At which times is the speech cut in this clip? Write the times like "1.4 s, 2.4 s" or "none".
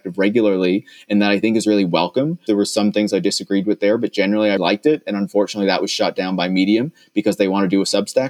2.5 s, 4.6 s